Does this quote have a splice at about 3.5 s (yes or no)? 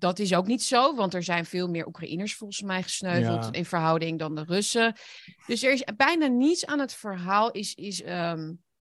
no